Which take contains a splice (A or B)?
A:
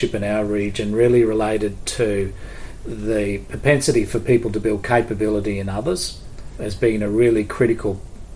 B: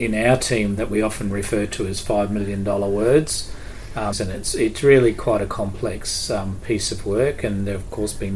B